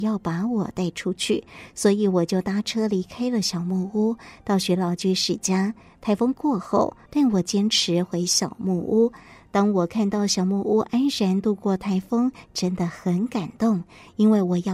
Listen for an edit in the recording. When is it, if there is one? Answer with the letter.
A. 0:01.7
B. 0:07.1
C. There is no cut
B